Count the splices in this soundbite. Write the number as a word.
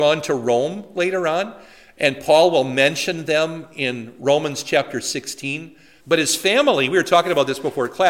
one